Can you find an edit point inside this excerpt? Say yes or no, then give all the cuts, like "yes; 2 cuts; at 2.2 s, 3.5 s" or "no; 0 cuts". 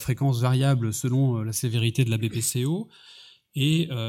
no; 0 cuts